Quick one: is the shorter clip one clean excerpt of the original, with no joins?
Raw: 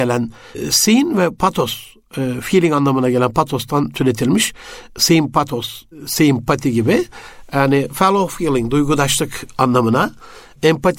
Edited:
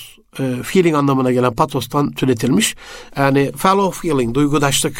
no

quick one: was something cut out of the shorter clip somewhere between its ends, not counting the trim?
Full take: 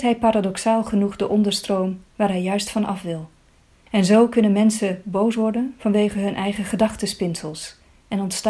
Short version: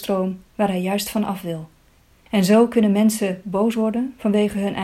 no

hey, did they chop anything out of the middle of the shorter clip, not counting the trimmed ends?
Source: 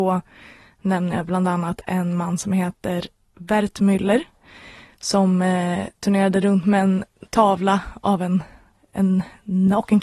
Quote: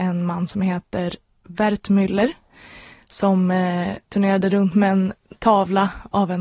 no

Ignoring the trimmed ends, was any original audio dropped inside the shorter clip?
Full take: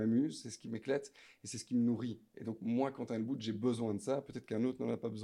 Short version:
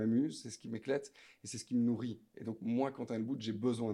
no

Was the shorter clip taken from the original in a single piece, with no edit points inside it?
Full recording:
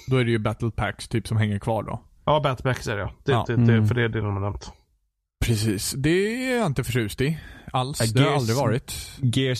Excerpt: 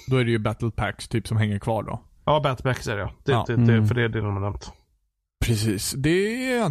yes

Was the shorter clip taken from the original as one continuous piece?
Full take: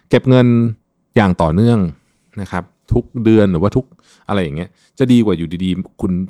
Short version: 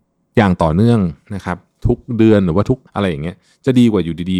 no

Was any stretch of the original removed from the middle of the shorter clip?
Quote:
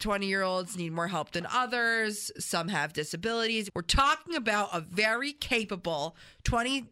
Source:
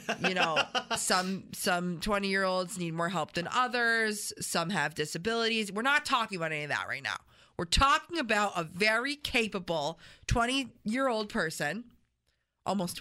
yes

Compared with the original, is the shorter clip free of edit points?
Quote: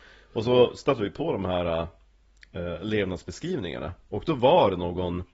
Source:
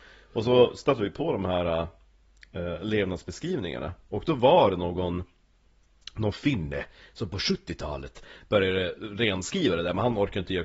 yes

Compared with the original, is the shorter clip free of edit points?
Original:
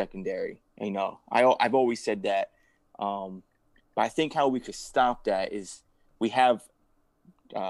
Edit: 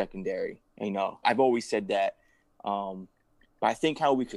no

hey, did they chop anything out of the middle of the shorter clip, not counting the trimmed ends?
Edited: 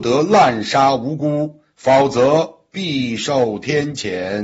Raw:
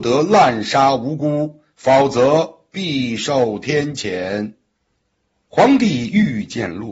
no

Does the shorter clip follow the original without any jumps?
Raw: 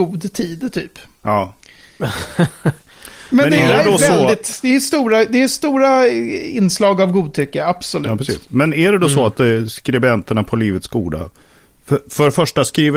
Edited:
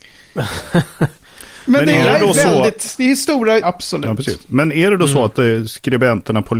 no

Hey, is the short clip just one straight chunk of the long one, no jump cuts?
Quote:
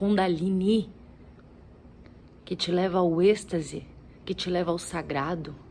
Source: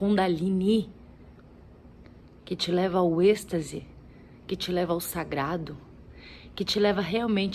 no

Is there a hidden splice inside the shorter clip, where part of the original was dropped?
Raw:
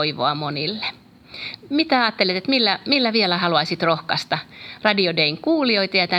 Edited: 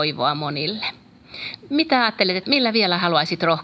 yes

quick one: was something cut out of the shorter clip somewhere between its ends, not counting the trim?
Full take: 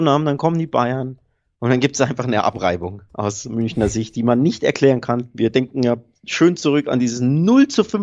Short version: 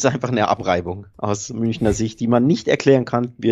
no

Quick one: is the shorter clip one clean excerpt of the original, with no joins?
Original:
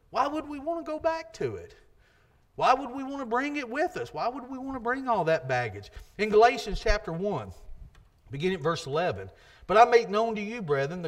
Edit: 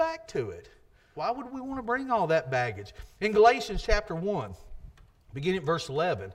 no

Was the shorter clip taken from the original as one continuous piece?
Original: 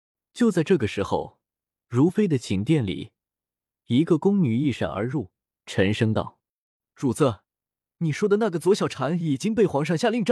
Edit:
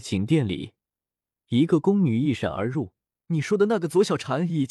no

